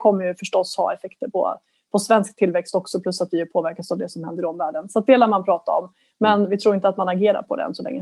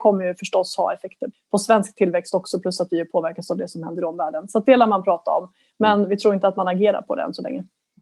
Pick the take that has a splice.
second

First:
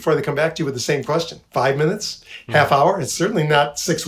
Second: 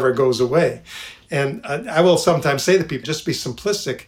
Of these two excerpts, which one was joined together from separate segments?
second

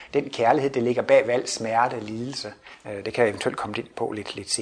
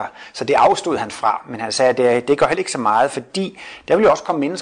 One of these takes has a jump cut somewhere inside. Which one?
first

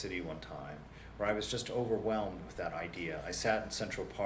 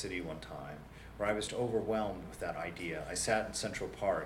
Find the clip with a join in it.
second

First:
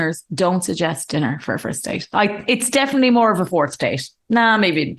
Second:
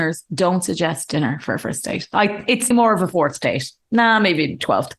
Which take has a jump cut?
second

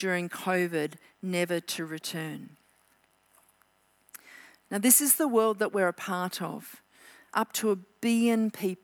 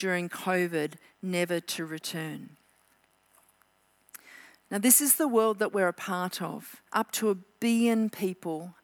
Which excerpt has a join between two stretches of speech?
second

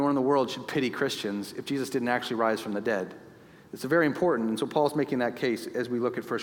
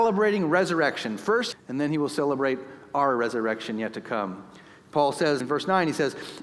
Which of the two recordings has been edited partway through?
second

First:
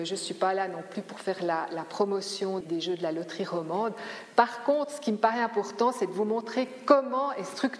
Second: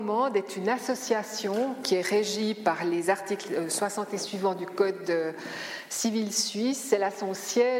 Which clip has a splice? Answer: first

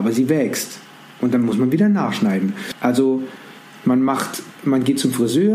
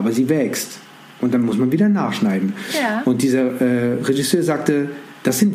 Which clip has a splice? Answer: first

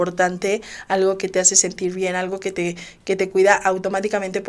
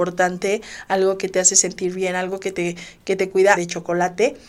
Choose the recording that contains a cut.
second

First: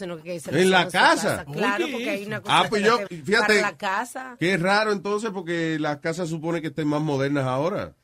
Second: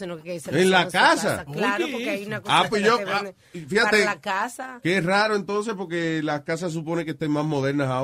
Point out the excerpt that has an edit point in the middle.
first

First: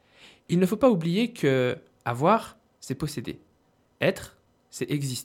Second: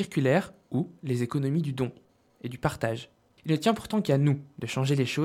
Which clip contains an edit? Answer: second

